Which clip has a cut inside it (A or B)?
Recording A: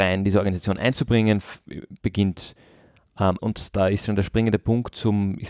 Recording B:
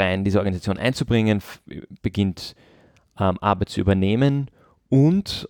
A